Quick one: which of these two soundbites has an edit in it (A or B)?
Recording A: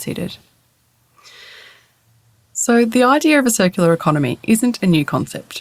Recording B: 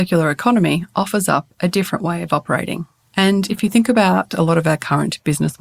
B